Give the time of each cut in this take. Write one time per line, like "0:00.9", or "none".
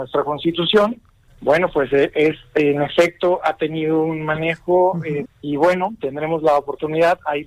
0:01.3
0:05.3